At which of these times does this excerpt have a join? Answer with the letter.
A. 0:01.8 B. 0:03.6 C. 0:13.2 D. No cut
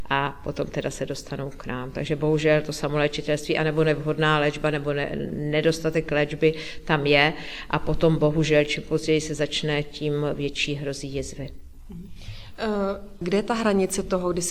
C